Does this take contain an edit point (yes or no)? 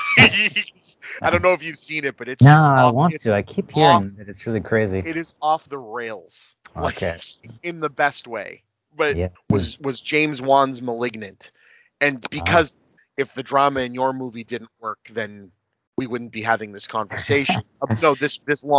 yes